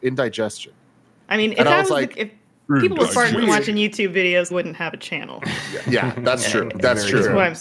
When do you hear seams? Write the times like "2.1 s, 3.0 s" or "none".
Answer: 4.5 s